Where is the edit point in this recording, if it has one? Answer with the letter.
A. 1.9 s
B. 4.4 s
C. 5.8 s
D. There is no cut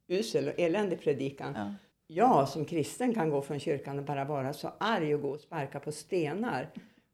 A